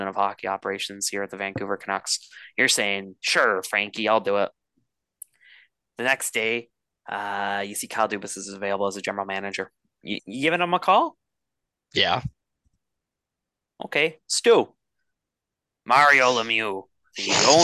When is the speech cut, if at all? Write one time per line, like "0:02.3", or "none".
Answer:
0:10.2